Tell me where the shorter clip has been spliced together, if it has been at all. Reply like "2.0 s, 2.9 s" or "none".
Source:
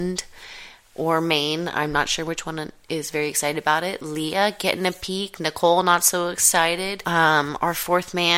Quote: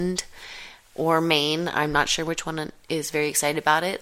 none